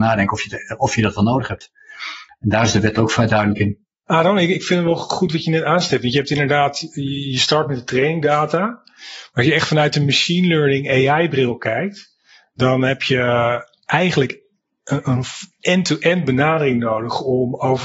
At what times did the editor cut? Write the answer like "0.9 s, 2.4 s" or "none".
none

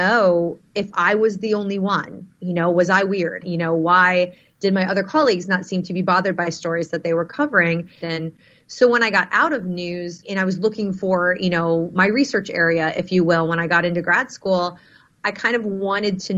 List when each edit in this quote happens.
3.4 s, 8.0 s

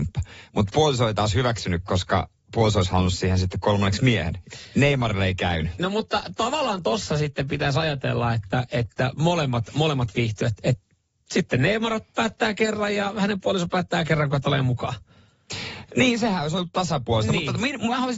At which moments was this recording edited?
10.6 s

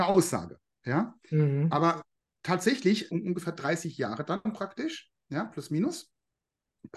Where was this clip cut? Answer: 3.1 s

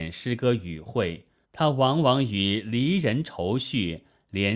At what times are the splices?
1.4 s

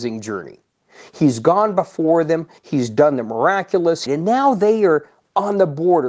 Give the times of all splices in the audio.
2.6 s, 4.1 s

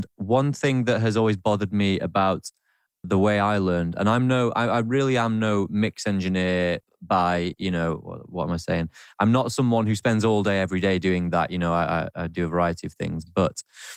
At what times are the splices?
3.0 s

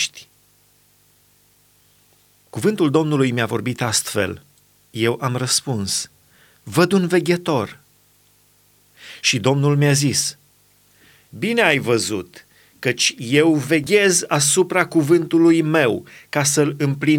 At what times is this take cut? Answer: 4.9 s

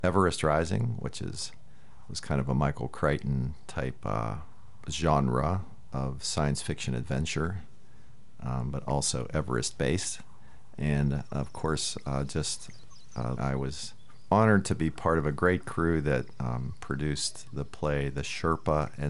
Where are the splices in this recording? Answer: 13.4 s

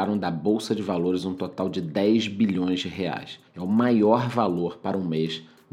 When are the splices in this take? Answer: 3.5 s

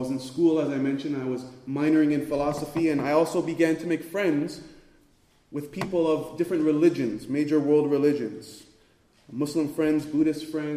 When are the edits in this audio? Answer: none

